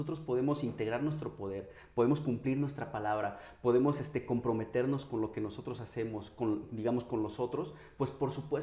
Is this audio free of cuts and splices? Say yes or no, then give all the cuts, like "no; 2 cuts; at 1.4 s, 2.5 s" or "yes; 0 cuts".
yes; 0 cuts